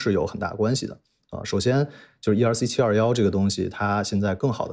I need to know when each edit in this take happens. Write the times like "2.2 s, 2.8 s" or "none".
none